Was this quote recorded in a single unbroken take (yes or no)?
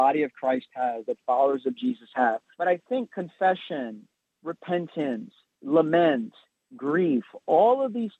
no